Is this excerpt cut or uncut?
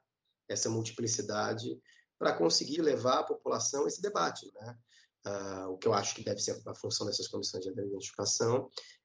cut